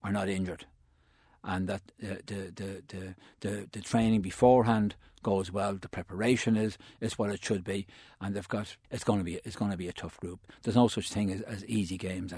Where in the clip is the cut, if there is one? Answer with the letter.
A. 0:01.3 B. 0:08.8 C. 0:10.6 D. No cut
B